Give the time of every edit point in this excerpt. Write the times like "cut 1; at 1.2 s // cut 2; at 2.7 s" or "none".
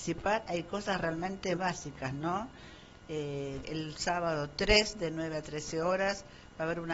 cut 1; at 1.6 s // cut 2; at 3.6 s